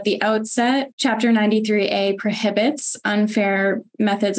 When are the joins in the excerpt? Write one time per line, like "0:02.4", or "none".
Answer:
0:00.9